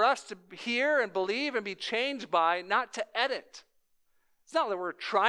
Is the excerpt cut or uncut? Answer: uncut